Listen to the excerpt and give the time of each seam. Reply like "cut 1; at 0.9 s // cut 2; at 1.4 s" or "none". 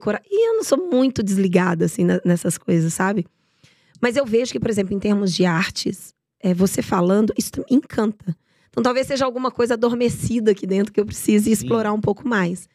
none